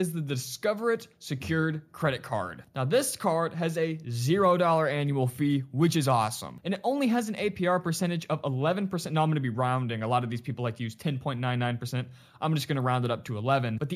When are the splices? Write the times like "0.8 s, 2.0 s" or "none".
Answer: none